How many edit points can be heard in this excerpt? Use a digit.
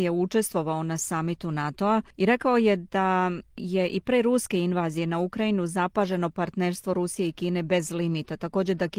1